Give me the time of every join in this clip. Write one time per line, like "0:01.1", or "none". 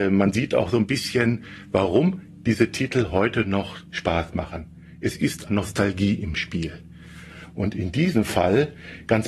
0:05.5